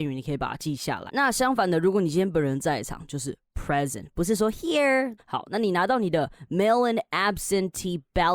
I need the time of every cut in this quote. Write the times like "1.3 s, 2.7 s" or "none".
1.1 s, 5.2 s